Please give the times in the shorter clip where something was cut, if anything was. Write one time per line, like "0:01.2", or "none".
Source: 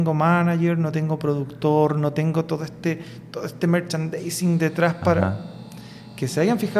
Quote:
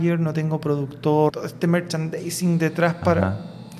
0:01.3